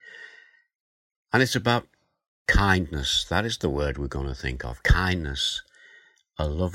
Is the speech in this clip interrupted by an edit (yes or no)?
no